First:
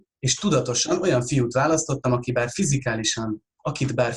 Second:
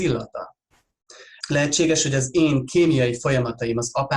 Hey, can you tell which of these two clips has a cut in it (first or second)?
second